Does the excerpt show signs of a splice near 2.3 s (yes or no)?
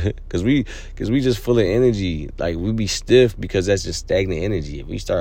no